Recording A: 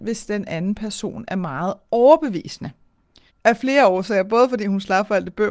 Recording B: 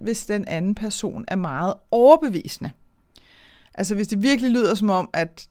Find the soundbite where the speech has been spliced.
A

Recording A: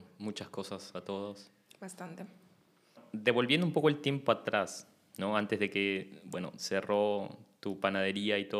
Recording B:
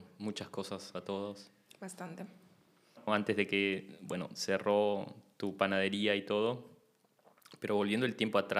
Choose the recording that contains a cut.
B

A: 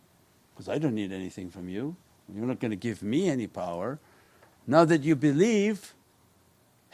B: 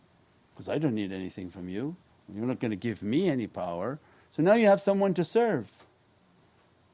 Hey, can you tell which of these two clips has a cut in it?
B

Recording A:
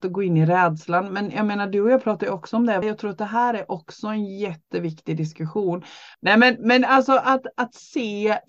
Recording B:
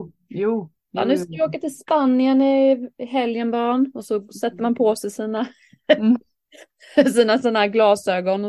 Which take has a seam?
A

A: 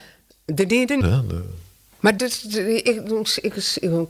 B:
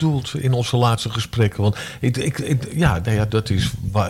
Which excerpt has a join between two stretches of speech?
A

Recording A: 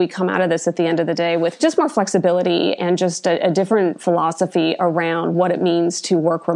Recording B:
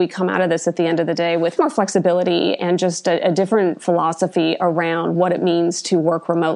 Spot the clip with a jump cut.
B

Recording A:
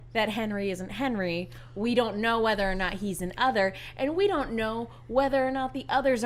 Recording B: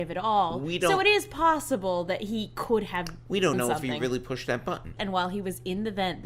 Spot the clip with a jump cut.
B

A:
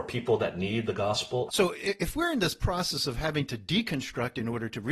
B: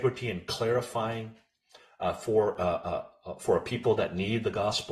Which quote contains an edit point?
A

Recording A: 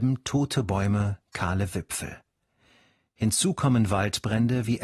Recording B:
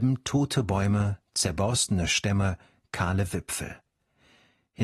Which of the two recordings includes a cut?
A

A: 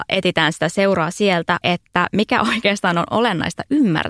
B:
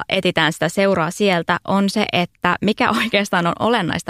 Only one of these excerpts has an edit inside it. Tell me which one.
A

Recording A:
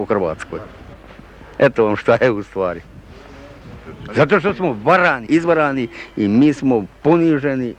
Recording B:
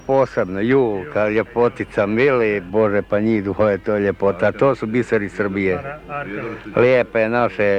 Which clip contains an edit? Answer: A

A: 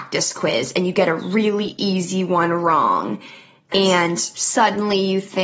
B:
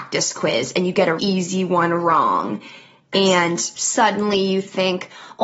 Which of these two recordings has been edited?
B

